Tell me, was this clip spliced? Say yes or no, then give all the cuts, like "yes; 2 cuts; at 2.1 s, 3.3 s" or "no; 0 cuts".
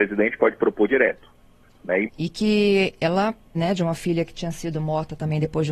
yes; 2 cuts; at 2.0 s, 3.5 s